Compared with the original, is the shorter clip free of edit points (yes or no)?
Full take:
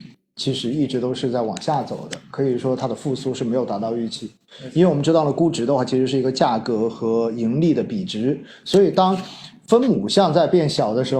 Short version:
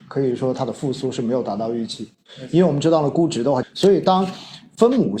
no